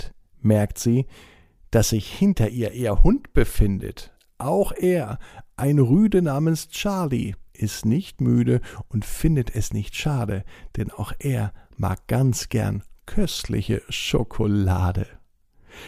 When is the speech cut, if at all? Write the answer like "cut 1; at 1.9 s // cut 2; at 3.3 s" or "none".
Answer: none